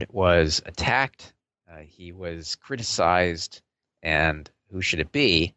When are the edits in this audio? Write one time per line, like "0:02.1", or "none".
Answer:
0:03.8